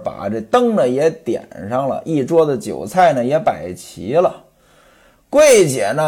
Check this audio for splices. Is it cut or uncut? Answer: uncut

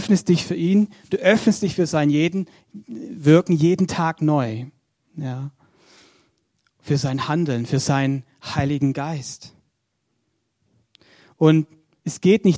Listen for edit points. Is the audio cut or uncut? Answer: uncut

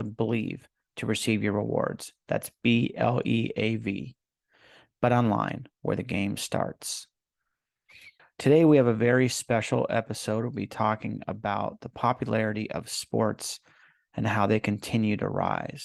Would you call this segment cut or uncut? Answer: cut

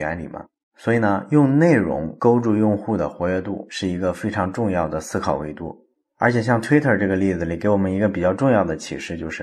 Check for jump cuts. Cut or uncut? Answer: uncut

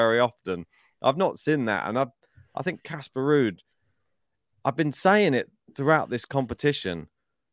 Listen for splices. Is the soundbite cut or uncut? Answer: uncut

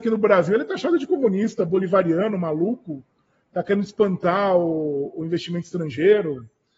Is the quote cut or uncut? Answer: uncut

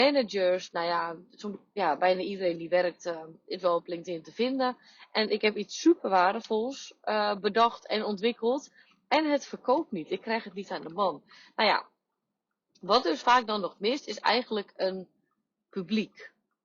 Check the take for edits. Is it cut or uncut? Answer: uncut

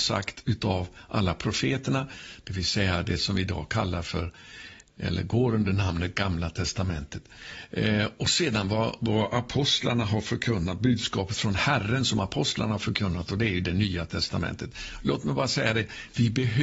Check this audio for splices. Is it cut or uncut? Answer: uncut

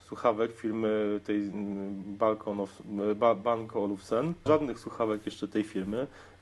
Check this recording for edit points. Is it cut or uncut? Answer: cut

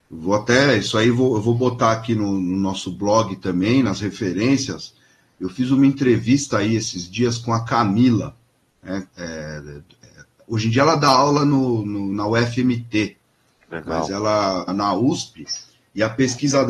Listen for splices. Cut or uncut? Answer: cut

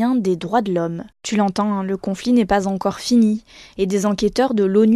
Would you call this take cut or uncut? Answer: cut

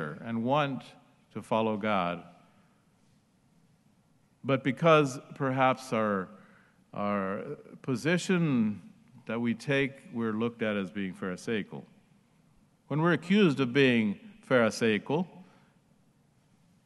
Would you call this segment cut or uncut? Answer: cut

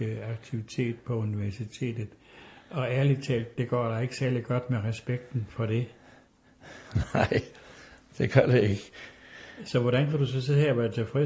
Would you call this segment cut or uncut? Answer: uncut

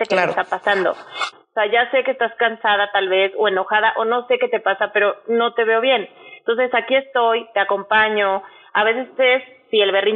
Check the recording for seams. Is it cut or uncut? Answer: cut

